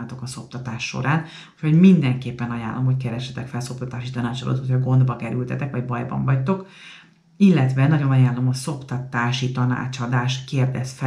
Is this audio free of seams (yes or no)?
yes